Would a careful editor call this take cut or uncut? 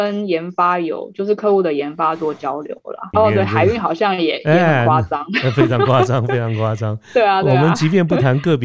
cut